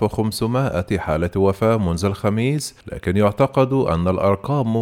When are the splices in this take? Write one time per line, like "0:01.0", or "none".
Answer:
0:02.8